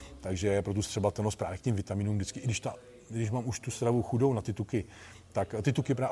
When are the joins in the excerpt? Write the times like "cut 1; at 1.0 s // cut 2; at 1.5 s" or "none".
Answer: none